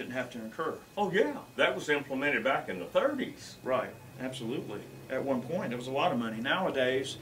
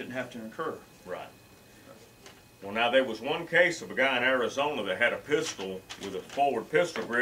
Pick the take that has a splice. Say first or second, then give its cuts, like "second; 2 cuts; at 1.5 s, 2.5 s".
first; 2 cuts; at 0.9 s, 4.1 s